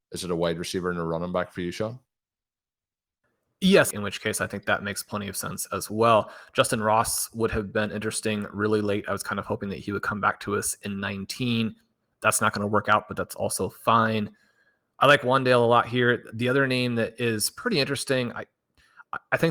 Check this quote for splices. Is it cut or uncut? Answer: cut